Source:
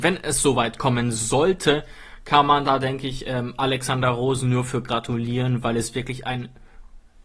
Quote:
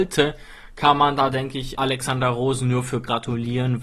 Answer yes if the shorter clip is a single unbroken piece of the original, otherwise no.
no